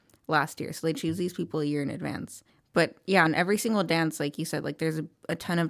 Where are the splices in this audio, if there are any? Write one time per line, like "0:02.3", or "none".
none